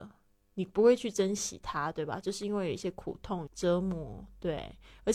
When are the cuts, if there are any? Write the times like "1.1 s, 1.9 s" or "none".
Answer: 3.5 s